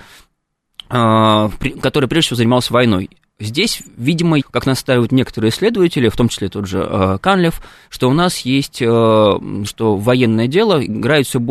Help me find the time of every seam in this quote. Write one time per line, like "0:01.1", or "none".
0:04.4
0:09.7